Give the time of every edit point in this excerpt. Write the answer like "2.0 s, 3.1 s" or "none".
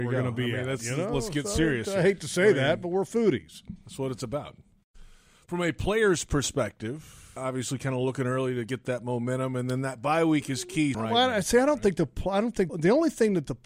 7.4 s, 10.9 s, 12.7 s